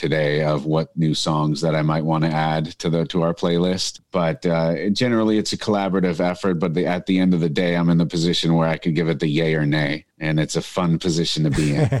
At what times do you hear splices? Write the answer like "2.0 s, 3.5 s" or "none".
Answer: none